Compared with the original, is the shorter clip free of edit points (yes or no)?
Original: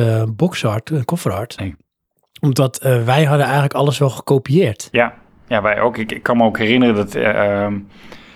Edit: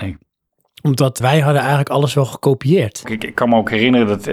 no